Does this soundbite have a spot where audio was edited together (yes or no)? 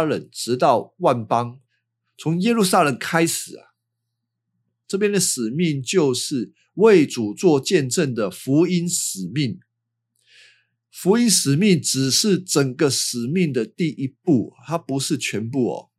yes